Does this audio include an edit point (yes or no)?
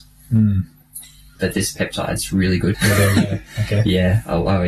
yes